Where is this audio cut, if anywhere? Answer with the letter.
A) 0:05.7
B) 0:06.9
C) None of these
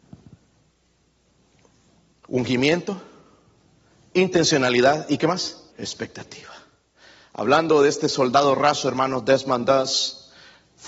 A